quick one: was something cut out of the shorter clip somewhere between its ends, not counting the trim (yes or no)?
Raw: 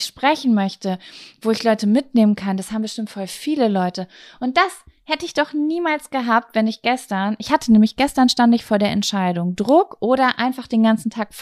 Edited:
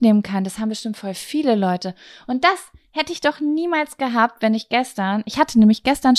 no